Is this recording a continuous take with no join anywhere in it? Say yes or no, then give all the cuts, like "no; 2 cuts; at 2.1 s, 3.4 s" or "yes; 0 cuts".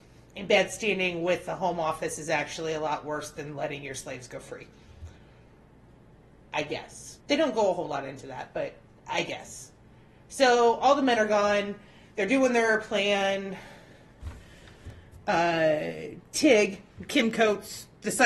no; 1 cut; at 7.2 s